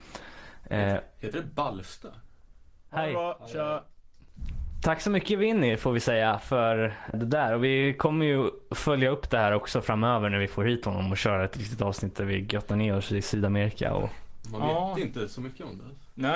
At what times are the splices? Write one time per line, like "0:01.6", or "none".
0:02.9
0:07.1
0:14.4